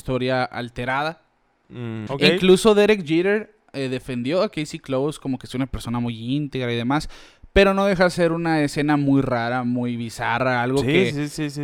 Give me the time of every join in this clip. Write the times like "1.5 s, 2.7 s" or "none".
2.1 s